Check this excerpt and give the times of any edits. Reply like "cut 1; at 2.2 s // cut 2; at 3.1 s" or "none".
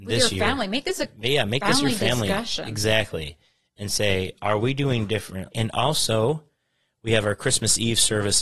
cut 1; at 5.5 s